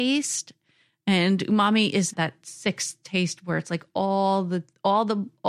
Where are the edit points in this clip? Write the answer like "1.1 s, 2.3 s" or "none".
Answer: 2.1 s